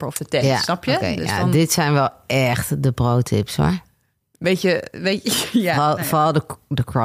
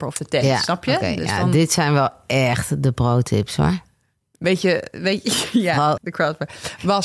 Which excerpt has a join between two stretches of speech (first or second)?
second